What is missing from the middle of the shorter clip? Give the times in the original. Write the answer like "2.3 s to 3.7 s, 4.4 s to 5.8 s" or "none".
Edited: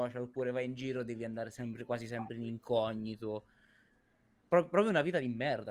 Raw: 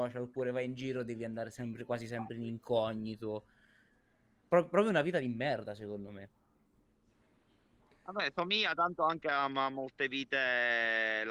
none